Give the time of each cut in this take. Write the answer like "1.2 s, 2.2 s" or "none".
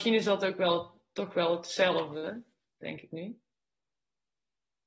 none